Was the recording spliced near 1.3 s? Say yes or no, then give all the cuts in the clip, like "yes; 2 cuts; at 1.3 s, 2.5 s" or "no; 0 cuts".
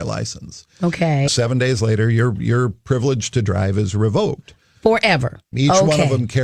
yes; 2 cuts; at 1.3 s, 5.5 s